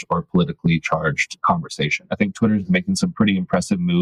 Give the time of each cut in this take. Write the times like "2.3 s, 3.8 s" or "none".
2.1 s